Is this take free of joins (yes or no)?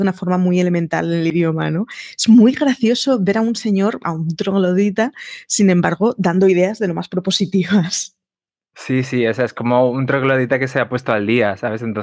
yes